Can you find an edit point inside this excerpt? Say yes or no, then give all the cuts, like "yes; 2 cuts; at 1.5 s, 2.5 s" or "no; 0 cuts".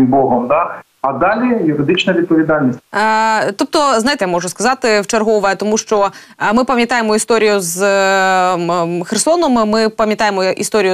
yes; 2 cuts; at 2.8 s, 4.2 s